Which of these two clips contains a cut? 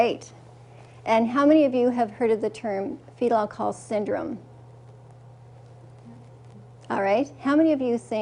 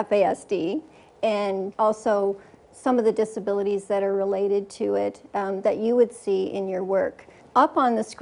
second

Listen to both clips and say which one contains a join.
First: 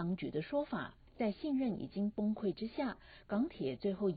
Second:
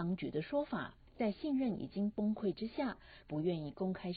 second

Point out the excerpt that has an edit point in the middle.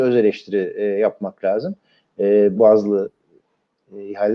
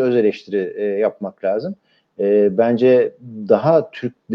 first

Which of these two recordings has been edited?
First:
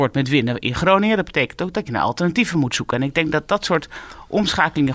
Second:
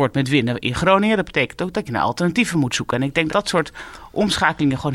second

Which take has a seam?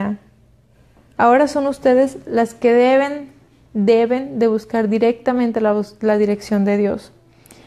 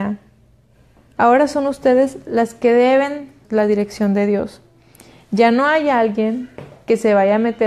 second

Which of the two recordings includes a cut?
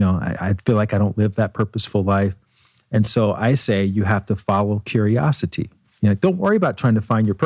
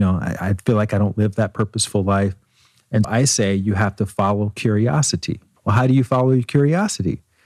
second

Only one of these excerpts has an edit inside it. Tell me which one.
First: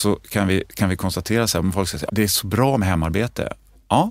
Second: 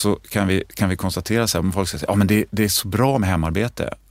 first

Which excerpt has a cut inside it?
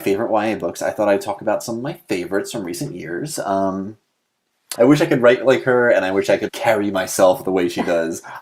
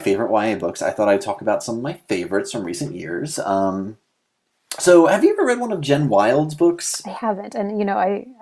first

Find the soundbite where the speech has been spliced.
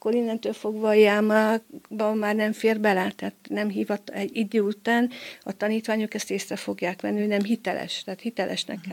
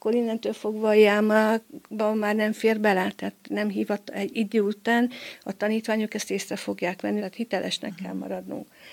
second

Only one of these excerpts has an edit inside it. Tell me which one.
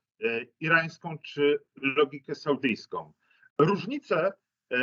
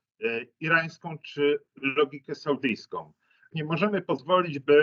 second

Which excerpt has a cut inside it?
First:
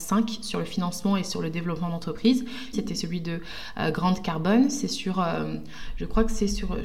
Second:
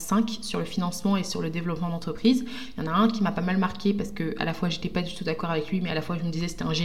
first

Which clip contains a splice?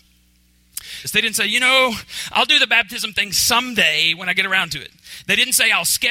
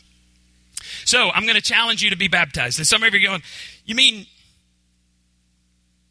first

